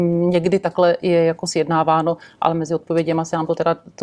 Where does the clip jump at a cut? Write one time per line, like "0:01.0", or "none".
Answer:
none